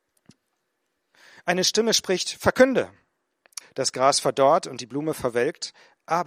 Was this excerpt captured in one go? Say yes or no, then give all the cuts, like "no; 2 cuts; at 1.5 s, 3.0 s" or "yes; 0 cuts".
no; 1 cut; at 3.6 s